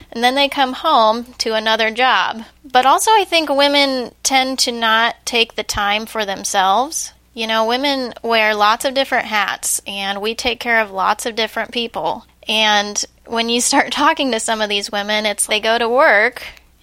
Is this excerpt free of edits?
no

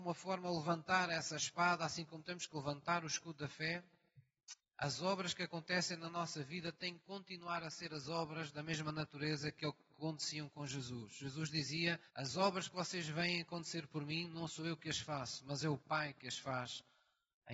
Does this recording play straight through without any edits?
no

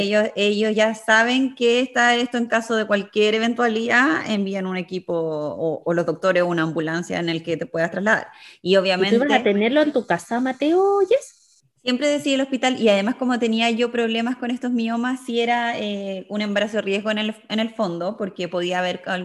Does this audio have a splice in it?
no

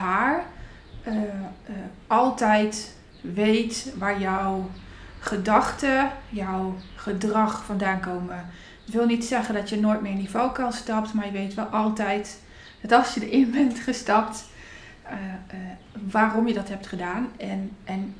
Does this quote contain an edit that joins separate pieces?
no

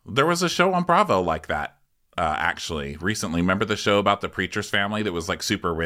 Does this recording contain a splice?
no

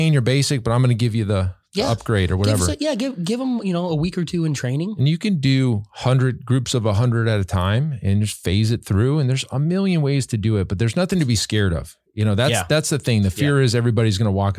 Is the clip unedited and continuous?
yes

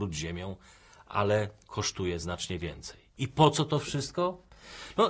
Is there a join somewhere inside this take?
no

